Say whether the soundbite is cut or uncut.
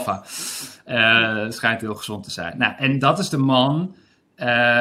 uncut